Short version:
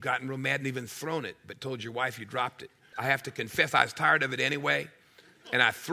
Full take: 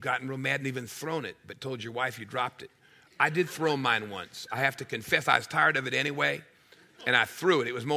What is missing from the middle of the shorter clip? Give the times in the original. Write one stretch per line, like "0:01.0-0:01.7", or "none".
0:02.9-0:04.5